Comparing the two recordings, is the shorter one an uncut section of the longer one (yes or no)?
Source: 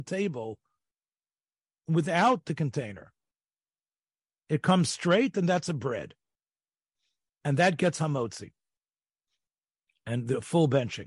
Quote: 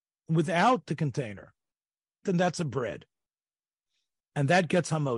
no